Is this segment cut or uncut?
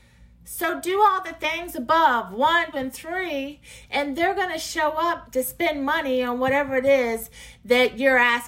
cut